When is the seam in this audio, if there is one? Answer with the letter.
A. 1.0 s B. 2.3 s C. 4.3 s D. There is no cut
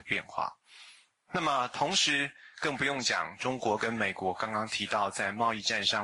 D